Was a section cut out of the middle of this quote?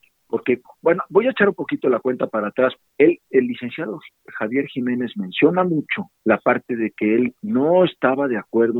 yes; 2 cuts; at 2.8 s, 6.2 s

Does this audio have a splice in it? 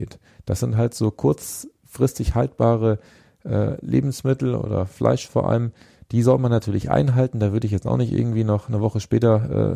no; 0 cuts

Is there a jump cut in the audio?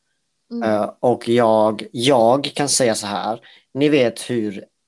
no; 0 cuts

